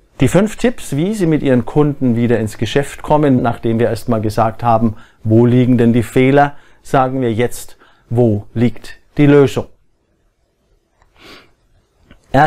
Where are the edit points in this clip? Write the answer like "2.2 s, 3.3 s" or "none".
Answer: 3.4 s